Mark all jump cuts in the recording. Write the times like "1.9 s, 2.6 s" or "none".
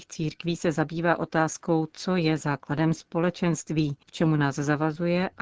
4.0 s